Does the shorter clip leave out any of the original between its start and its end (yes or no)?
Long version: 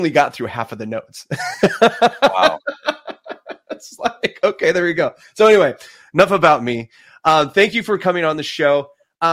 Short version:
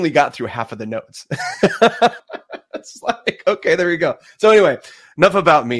yes